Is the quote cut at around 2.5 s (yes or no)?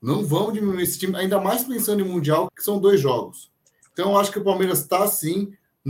yes